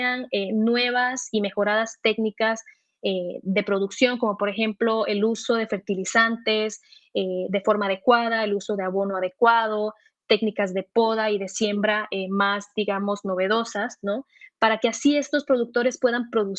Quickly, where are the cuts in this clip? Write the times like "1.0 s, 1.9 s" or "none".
none